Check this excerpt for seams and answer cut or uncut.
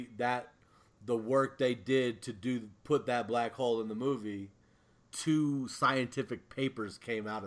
cut